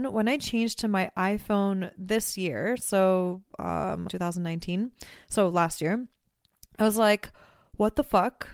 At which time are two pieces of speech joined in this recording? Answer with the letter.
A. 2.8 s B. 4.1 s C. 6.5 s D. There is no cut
B